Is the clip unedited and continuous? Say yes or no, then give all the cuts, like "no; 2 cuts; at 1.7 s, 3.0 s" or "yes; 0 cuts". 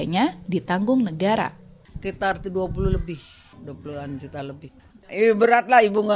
yes; 0 cuts